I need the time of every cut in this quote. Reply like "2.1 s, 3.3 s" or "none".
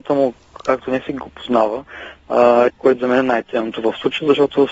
2.7 s